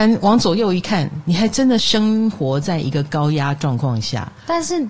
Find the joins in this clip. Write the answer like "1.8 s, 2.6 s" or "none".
none